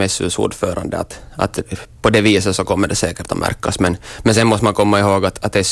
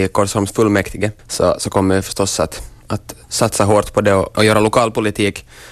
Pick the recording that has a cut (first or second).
second